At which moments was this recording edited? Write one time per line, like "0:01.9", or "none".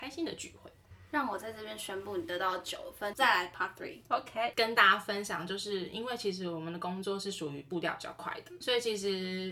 0:03.1
0:04.5
0:08.6